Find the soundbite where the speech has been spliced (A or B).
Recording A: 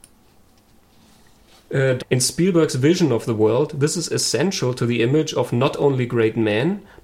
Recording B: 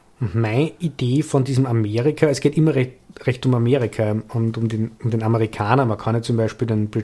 A